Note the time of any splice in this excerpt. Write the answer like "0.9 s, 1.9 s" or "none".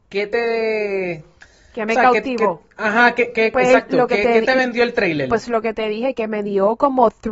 none